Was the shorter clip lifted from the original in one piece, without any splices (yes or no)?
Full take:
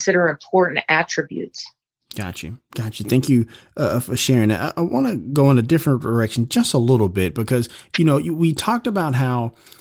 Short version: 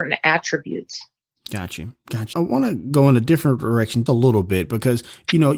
no